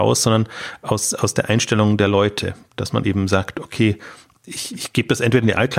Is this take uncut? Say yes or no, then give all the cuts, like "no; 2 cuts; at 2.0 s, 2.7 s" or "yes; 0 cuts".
yes; 0 cuts